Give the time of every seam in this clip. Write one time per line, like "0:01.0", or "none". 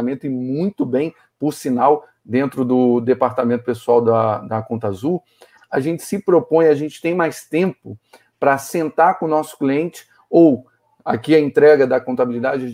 none